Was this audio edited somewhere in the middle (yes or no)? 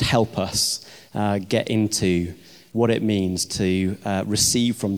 no